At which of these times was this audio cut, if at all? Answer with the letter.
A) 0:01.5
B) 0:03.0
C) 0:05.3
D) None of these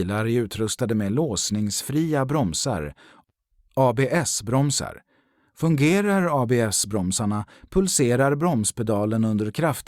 D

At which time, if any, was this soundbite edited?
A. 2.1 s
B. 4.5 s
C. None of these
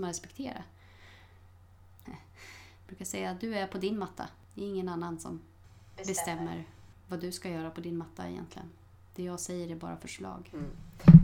A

